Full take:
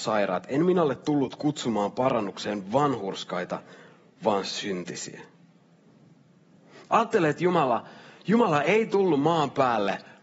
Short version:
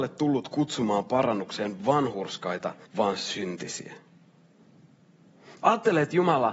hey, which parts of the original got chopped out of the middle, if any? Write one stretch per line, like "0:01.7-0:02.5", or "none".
0:03.7-0:04.1

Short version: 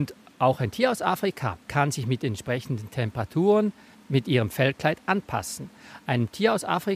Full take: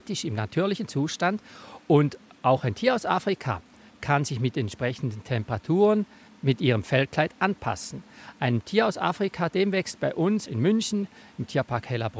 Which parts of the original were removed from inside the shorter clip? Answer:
0:03.7-0:04.0

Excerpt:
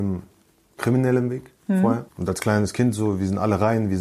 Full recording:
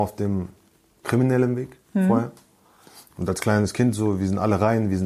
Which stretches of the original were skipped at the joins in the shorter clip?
0:02.3-0:03.1

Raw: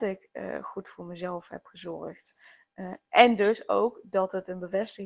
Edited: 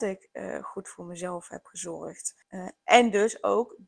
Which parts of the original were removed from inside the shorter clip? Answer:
0:02.4-0:02.7

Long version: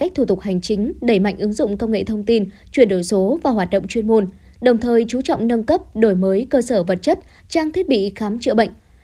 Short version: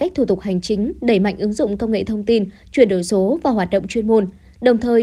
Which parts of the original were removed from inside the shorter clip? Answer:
none

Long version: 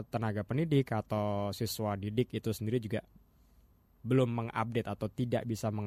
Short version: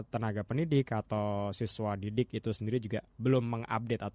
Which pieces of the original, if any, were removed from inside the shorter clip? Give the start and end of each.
0:03.1-0:03.9

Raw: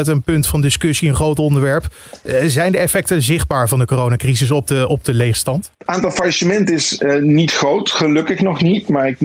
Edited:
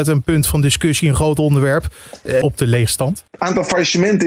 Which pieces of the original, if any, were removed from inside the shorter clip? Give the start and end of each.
0:02.4-0:04.9

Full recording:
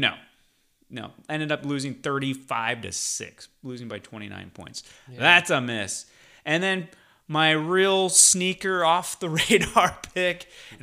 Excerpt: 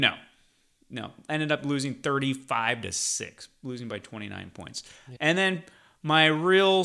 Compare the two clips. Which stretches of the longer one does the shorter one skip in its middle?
0:05.2-0:06.4

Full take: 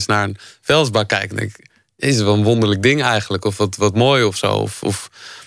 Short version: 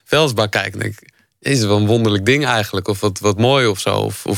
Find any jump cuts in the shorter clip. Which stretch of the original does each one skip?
none

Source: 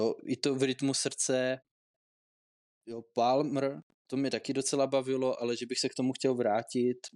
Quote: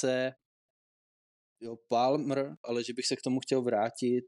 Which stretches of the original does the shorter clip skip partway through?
0:03.9-0:05.4

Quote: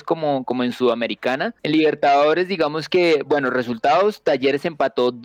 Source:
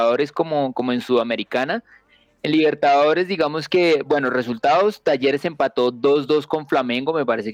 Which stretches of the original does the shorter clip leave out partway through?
0:01.9-0:02.4

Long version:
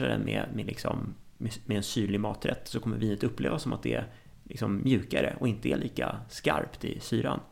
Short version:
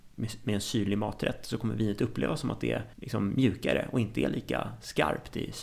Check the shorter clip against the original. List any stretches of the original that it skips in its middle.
0:04.2-0:04.4

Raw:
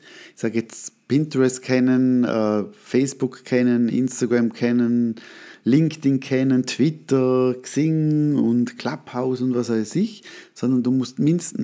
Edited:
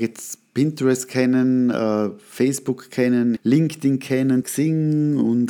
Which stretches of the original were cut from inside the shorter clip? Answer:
0:03.9-0:05.6
0:06.6-0:07.6

